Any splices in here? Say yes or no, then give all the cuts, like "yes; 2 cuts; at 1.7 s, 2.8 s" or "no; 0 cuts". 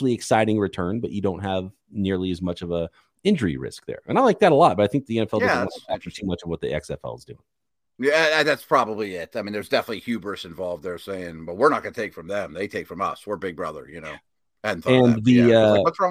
no; 0 cuts